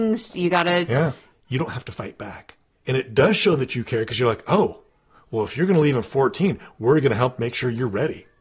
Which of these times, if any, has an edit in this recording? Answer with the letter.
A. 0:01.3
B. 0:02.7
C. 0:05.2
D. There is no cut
A